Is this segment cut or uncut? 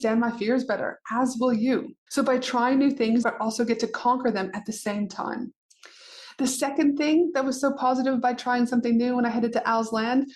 cut